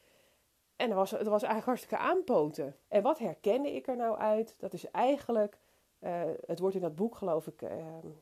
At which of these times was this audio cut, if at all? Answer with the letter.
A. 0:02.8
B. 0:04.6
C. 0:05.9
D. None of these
A